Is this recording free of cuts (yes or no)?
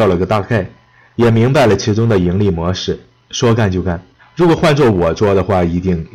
no